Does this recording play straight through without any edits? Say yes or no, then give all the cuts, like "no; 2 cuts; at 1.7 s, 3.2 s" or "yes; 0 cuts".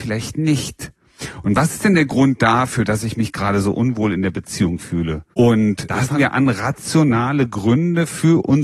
no; 1 cut; at 5.3 s